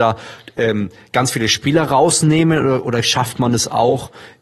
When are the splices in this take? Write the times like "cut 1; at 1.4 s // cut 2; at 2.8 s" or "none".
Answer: none